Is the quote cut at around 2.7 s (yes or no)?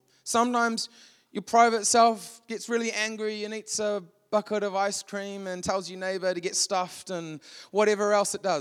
no